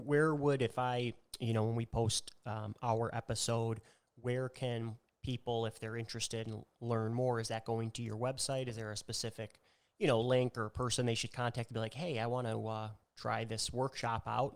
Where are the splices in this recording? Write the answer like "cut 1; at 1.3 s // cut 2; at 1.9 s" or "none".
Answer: none